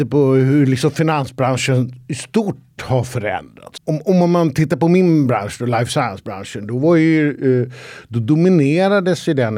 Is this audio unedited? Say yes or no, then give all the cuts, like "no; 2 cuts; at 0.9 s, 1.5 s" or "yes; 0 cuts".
no; 1 cut; at 3.8 s